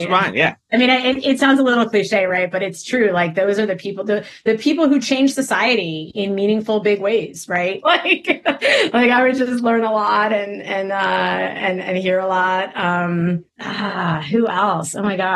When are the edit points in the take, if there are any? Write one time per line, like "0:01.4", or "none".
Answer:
0:07.8